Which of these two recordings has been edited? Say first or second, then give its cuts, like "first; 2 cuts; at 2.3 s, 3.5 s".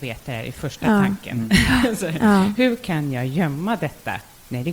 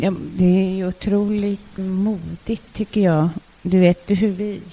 second; 1 cut; at 1.8 s